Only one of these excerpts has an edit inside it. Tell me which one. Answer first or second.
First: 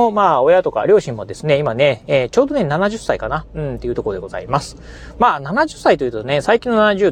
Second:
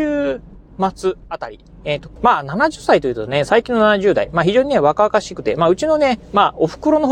second